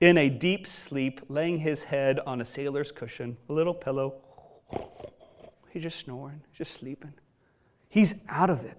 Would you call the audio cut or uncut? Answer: uncut